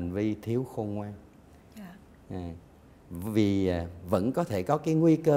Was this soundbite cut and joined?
no; 0 cuts

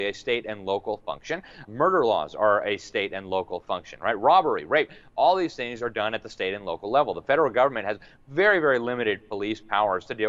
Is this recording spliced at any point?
yes; 1 cut; at 1.6 s

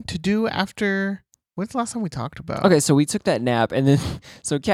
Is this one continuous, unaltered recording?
yes; 0 cuts

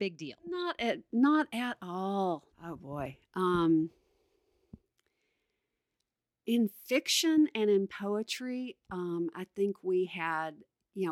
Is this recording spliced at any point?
yes; 1 cut; at 2.5 s

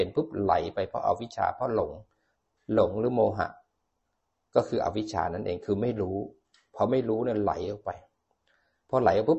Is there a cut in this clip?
no; 0 cuts

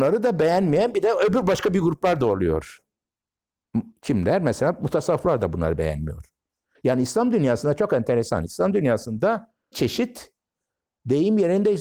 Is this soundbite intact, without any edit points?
no; 1 cut; at 9.7 s

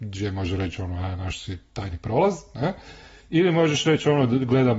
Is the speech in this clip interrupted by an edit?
no; 0 cuts

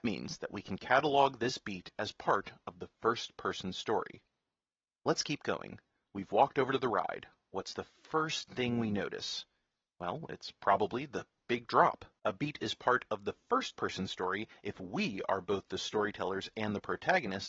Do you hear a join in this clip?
yes; 1 cut; at 12.2 s

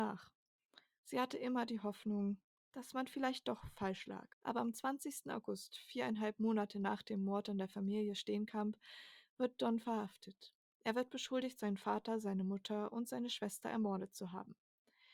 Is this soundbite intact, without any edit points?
no; 1 cut; at 4.3 s

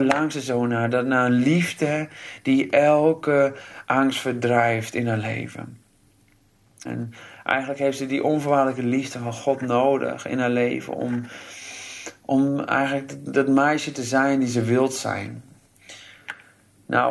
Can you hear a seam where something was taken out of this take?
yes; 1 cut; at 6.9 s

